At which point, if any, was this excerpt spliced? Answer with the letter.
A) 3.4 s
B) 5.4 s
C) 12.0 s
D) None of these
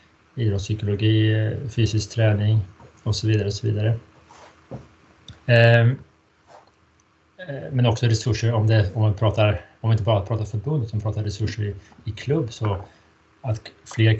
B